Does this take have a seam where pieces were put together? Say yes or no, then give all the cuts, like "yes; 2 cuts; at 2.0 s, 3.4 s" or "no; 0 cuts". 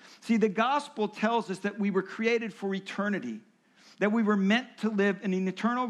no; 0 cuts